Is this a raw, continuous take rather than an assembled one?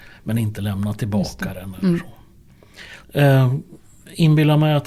no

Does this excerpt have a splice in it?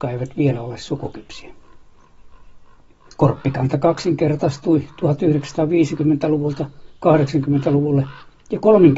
yes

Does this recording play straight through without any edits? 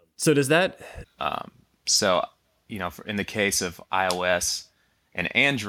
no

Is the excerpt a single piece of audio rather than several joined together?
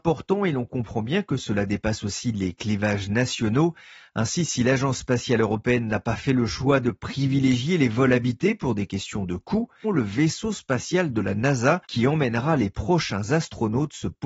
no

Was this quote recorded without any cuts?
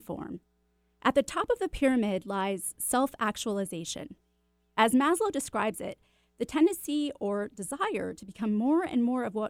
yes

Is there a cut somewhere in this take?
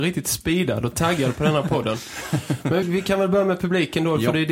yes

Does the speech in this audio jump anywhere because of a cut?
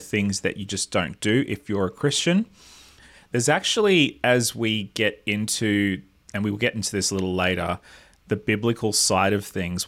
no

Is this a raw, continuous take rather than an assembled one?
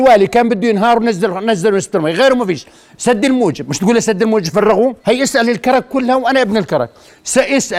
no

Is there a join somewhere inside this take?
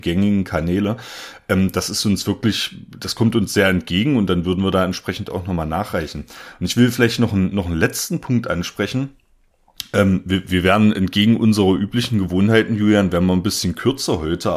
no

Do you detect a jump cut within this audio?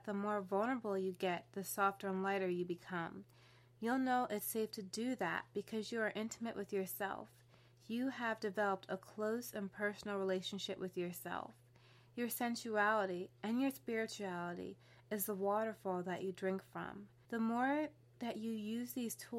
yes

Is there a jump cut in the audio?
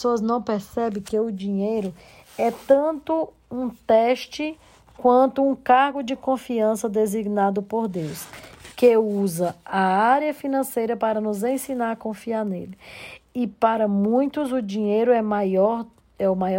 no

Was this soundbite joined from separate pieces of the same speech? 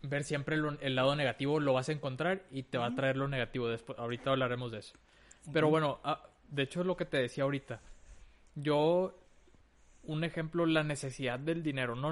no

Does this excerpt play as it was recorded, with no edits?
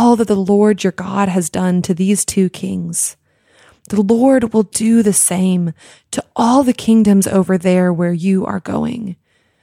yes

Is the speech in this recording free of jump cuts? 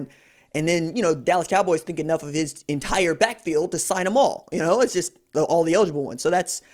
yes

